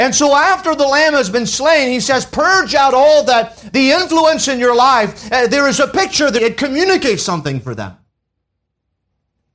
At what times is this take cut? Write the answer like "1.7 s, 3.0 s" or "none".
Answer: 3.7 s, 6.4 s